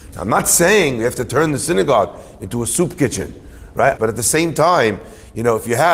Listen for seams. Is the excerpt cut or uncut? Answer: cut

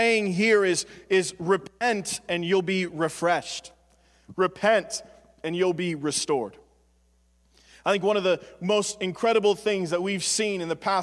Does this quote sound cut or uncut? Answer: uncut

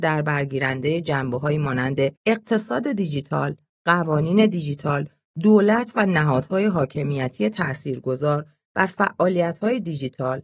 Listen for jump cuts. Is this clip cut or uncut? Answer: cut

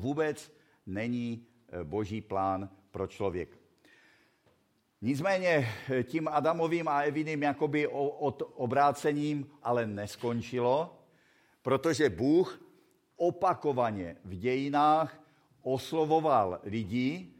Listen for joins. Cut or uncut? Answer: cut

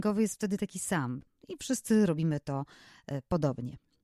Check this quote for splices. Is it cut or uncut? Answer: cut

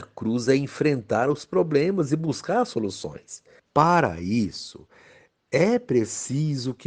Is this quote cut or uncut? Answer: cut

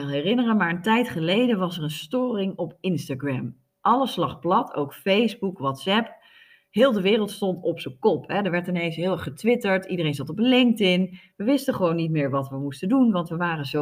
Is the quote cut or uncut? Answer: uncut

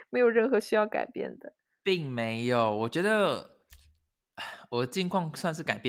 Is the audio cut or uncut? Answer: uncut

